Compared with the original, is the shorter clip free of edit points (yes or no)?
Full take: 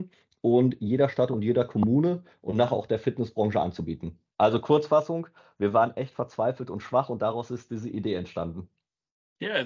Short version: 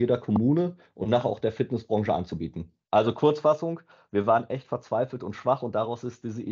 yes